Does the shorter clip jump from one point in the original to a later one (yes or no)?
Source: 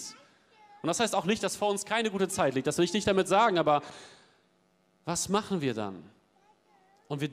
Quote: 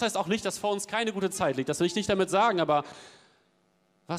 no